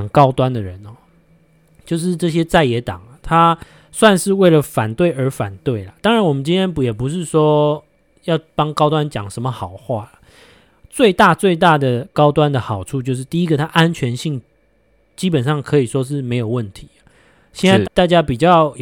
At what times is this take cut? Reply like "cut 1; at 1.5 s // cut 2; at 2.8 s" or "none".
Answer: cut 1; at 17.8 s